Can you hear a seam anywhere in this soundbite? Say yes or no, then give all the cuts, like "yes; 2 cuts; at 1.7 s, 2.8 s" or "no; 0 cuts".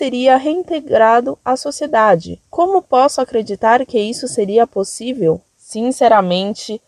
no; 0 cuts